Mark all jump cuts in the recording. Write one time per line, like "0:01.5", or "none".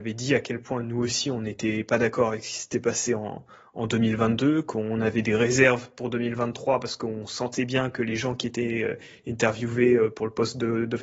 none